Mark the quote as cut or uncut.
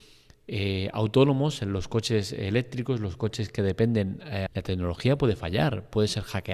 cut